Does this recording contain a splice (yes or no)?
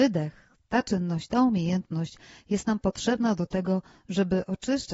no